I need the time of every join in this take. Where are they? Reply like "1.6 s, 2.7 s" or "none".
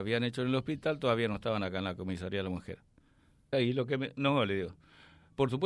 3.5 s